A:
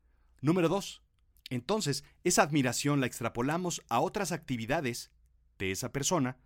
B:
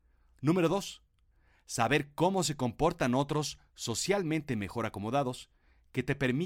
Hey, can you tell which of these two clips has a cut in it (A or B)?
A